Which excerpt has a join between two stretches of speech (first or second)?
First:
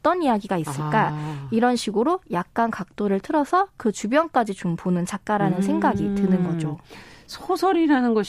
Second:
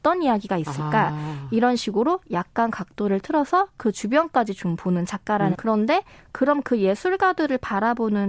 second